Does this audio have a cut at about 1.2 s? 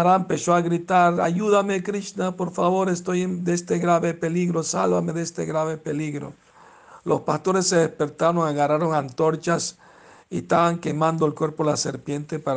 no; 0 cuts

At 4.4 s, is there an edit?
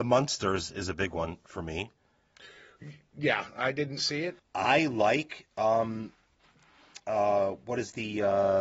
yes; 1 cut; at 4.4 s

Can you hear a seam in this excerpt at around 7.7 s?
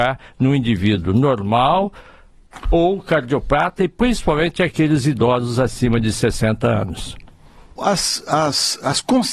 yes; 1 cut; at 7.7 s

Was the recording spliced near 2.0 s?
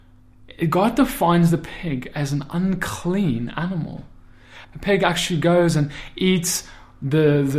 no; 1 cut; at 4.6 s

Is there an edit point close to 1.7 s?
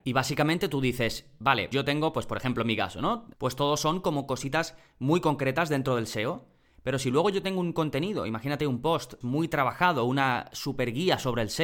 no; 2 cuts; at 3.3 s, 9.2 s

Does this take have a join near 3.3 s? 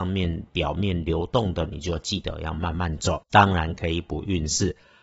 yes; 1 cut; at 3.3 s

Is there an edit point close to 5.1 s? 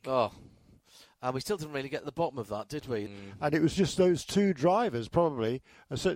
no; 1 cut; at 3.1 s

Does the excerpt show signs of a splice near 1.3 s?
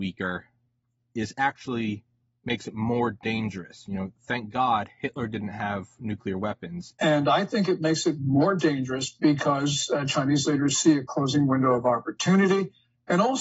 no; 1 cut; at 6.9 s

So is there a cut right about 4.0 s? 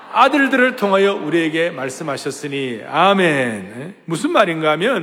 no; 0 cuts

